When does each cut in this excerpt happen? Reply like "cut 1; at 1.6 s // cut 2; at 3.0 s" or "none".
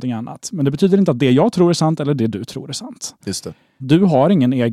cut 1; at 3.8 s